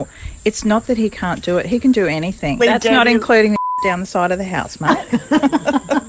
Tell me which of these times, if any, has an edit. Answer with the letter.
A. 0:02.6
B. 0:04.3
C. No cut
A